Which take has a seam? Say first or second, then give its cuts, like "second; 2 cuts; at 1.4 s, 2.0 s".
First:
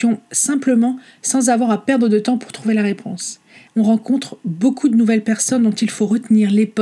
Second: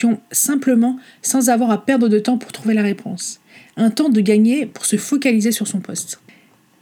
first; 1 cut; at 3.7 s